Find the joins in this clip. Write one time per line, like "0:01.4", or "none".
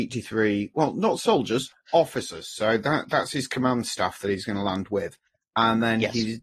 none